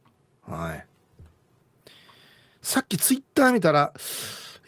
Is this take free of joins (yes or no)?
yes